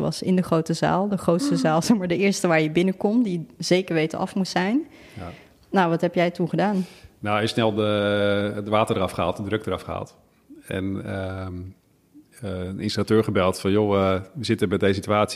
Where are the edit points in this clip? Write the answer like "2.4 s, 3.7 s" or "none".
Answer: none